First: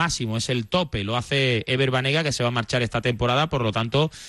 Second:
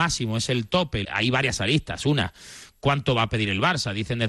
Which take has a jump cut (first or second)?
second